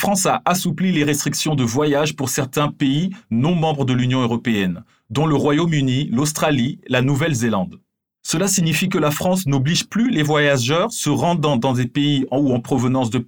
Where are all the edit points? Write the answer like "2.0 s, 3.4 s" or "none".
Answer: none